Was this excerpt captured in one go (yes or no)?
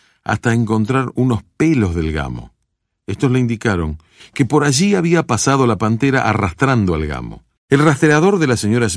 no